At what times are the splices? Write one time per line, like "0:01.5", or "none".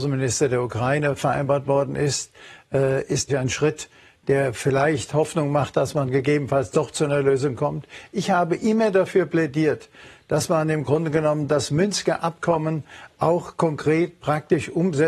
0:03.3